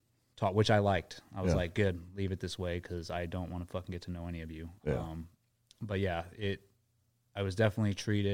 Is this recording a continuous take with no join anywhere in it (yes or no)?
yes